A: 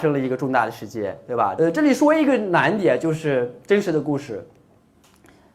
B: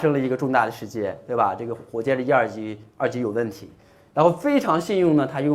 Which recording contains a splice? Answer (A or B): A